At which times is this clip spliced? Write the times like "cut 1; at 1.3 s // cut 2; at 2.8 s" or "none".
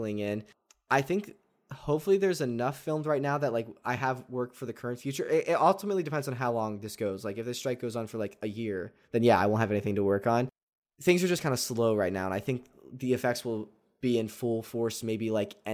none